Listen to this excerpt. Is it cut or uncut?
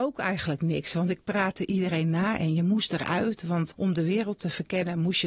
cut